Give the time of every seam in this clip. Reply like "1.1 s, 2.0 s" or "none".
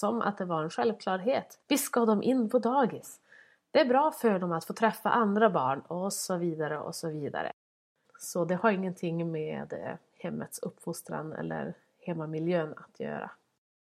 1.6 s, 8.0 s